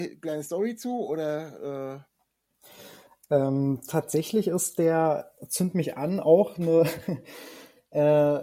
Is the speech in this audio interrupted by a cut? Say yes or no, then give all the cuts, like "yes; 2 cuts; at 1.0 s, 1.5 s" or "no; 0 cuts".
no; 0 cuts